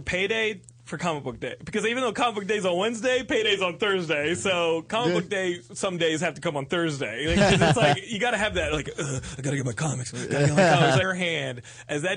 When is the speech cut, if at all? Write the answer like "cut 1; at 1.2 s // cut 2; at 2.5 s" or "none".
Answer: cut 1; at 11.0 s